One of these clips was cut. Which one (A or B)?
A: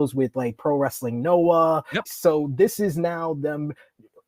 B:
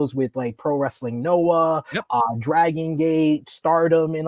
A